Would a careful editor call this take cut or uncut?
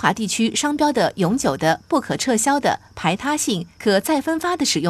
uncut